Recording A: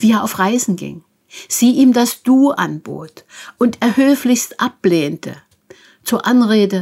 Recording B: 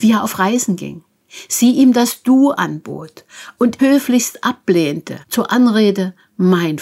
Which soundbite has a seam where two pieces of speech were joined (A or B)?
B